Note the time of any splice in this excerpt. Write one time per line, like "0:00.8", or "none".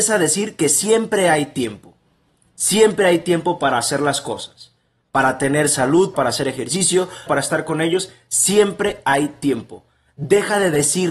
0:06.1
0:07.3